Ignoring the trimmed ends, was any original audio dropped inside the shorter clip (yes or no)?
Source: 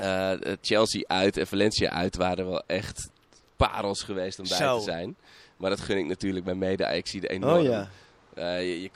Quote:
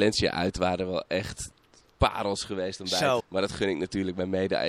yes